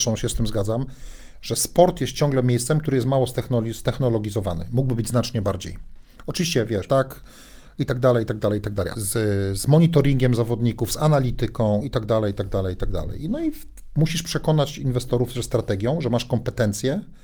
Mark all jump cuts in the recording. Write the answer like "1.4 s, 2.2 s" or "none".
6.9 s, 8.9 s